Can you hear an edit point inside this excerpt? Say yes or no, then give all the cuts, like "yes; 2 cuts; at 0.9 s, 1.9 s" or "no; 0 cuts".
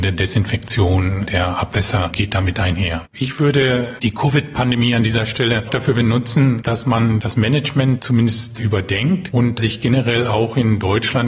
yes; 1 cut; at 3.1 s